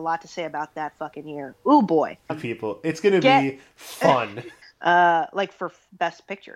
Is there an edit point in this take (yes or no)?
yes